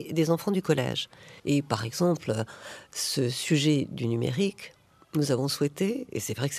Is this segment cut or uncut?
cut